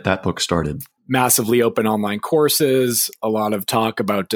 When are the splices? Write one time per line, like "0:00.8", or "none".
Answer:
0:01.0